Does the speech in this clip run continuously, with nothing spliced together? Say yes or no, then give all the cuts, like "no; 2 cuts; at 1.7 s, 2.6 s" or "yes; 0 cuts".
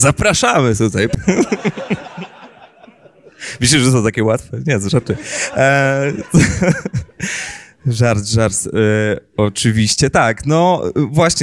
yes; 0 cuts